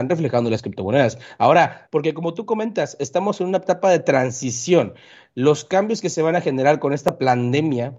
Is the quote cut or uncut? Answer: cut